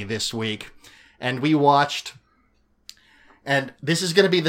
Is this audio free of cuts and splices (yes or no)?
yes